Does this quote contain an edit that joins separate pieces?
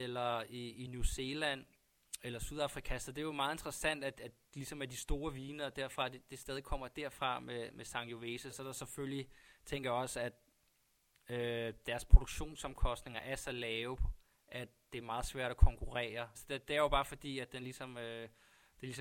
yes; 2 cuts; at 8.5 s, 16.3 s

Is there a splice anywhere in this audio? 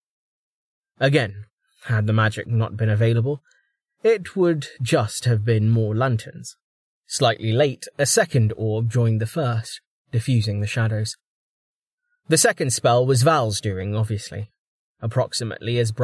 no; 0 cuts

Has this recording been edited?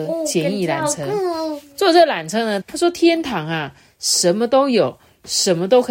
yes; 1 cut; at 2.6 s

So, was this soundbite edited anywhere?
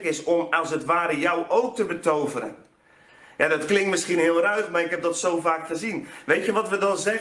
no; 0 cuts

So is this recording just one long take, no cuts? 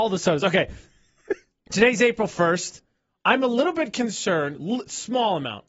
yes; 0 cuts

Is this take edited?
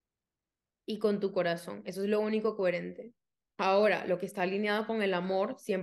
yes; 1 cut; at 3.5 s

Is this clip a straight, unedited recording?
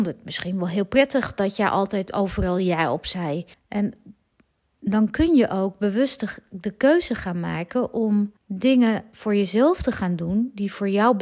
no; 2 cuts; at 3.5 s, 8.4 s

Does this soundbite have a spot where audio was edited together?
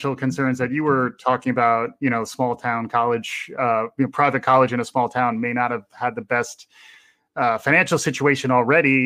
no; 0 cuts

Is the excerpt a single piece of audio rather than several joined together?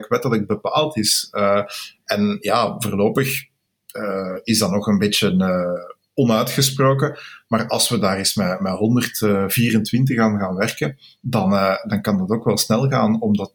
no; 1 cut; at 8.6 s

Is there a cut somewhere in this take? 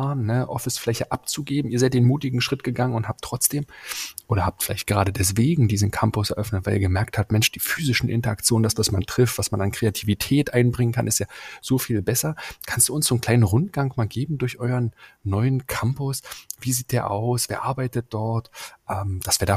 no; 0 cuts

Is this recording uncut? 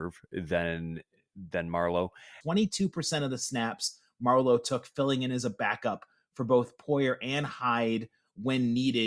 no; 1 cut; at 2.4 s

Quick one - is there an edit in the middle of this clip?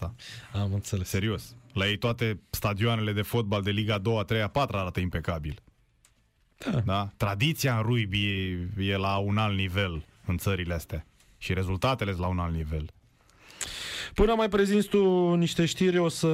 no; 0 cuts

